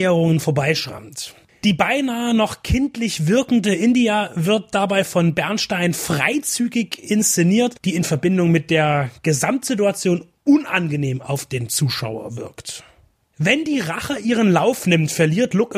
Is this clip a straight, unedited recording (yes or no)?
no